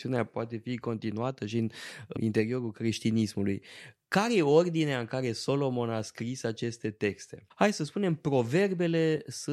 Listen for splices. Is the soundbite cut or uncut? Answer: cut